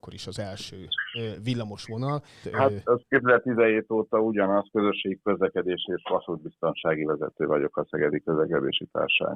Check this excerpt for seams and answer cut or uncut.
cut